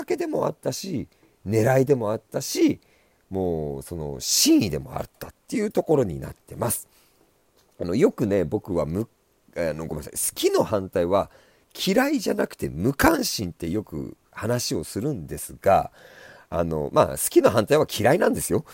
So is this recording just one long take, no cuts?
yes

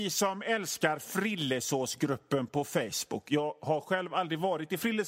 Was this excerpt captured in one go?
yes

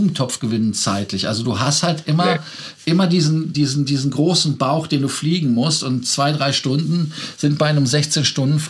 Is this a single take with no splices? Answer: yes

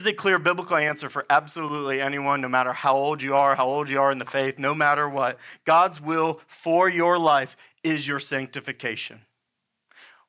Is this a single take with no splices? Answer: yes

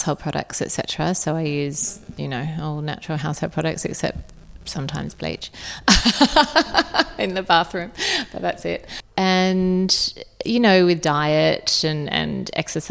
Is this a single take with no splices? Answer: yes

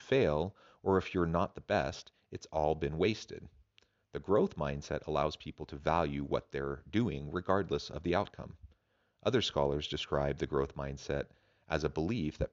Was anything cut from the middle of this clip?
no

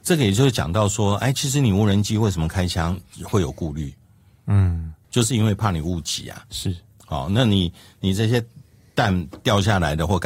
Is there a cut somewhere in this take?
no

